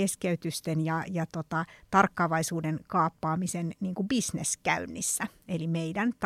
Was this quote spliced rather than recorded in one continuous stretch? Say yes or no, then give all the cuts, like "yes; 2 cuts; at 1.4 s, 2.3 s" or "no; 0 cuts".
no; 0 cuts